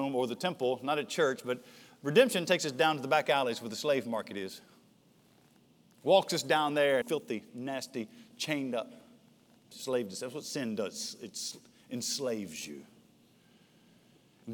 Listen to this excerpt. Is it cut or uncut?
cut